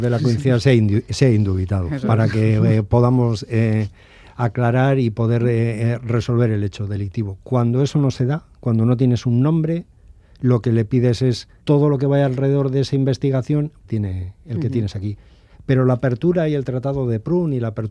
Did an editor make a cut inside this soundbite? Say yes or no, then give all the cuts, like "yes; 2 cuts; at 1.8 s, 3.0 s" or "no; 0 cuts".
yes; 2 cuts; at 11.6 s, 13.8 s